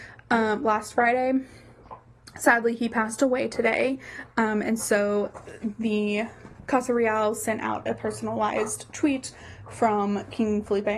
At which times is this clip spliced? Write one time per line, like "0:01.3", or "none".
none